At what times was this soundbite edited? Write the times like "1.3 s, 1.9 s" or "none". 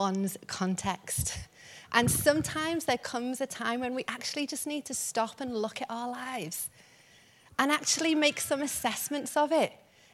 none

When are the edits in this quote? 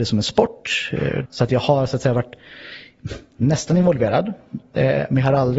1.2 s

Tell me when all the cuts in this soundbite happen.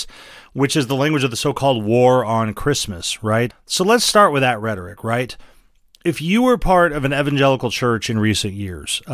3.5 s

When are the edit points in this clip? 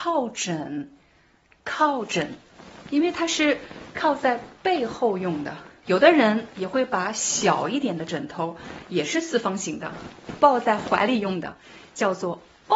5.8 s

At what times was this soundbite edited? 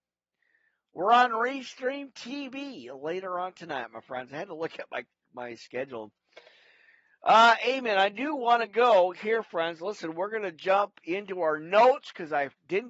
none

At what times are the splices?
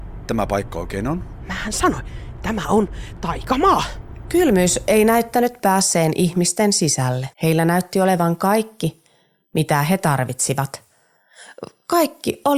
7.3 s

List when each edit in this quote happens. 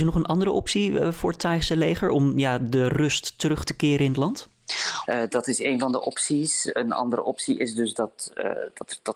5.1 s

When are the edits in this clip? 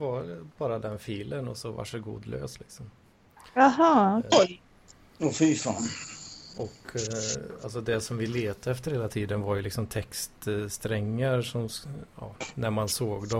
4.3 s

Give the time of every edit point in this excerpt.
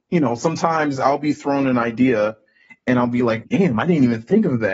3.4 s

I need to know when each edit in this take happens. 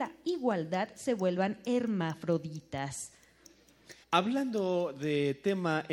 4.0 s

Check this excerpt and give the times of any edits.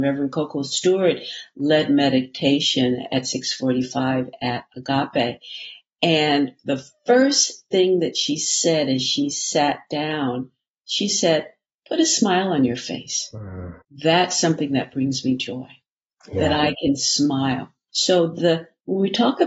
13.8 s, 17.9 s

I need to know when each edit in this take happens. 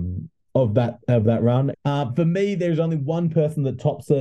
1.7 s

